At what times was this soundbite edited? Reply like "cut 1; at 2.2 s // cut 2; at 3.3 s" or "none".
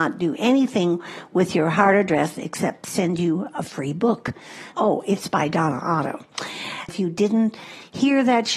cut 1; at 4.7 s // cut 2; at 6.9 s